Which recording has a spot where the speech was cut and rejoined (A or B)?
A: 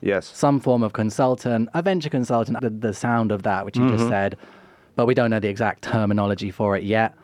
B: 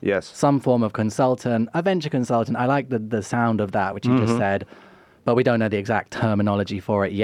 A